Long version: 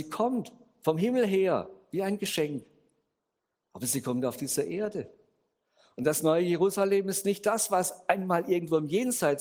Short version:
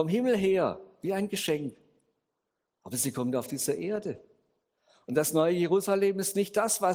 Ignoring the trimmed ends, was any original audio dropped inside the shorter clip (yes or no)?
no